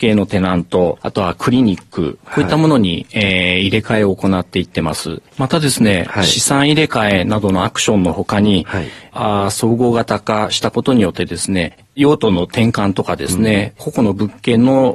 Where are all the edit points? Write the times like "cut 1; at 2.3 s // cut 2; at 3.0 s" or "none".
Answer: cut 1; at 5.3 s // cut 2; at 13.8 s